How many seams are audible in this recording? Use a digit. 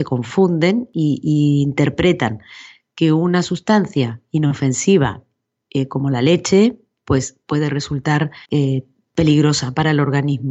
1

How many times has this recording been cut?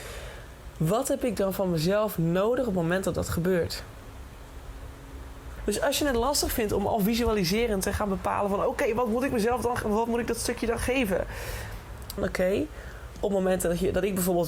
2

